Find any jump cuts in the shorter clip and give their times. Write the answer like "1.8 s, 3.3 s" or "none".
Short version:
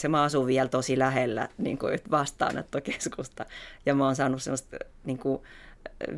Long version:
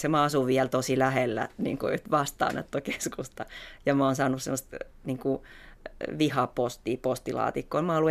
none